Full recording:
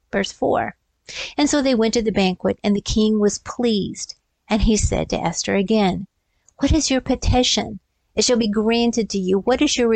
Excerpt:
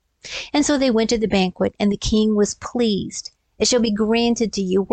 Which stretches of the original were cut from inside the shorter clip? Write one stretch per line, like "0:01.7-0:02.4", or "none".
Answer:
0:04.2-0:08.0